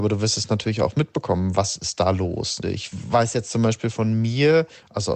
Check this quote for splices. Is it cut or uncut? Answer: cut